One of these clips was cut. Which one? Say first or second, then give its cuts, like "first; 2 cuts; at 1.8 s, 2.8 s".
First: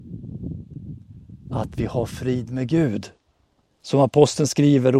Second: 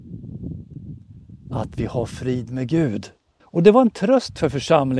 second; 1 cut; at 3.4 s